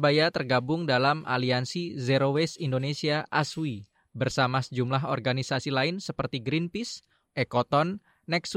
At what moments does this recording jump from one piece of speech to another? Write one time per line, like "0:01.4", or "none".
0:07.3